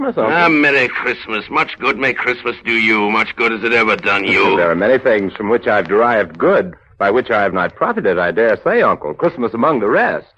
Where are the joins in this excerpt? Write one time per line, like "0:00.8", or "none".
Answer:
none